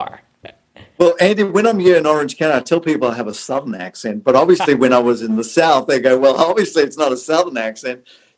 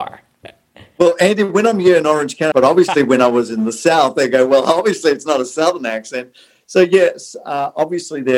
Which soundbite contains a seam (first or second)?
second